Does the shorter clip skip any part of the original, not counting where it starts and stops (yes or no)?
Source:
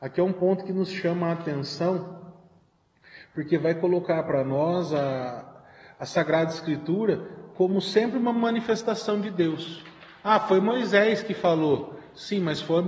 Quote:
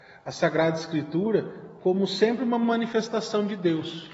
no